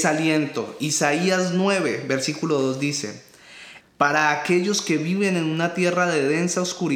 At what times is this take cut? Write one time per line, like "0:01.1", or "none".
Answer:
0:03.8